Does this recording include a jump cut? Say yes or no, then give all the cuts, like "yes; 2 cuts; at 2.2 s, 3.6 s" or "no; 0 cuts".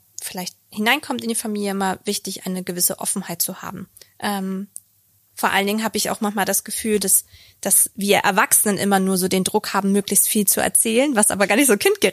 yes; 1 cut; at 4.0 s